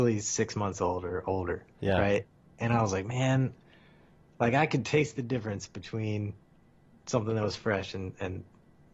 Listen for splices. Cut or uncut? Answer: uncut